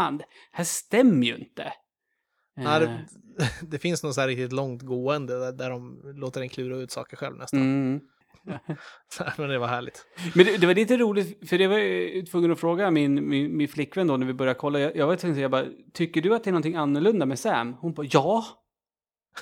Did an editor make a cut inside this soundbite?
yes; 1 cut; at 8.2 s

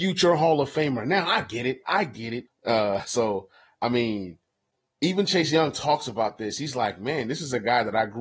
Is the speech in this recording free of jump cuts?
no; 1 cut; at 2.5 s

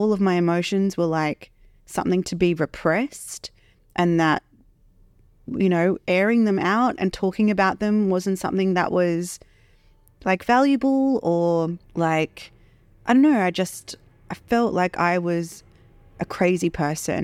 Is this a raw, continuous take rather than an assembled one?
no; 1 cut; at 11.8 s

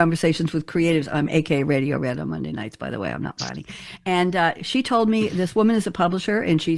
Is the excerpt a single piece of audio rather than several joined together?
yes; 0 cuts

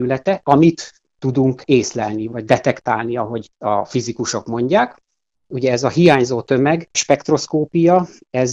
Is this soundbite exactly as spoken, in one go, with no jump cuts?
no; 1 cut; at 5.3 s

